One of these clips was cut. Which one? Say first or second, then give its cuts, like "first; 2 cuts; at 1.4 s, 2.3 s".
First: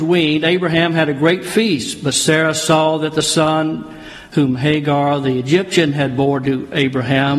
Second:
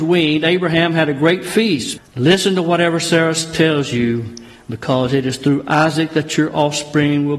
second; 1 cut; at 2.0 s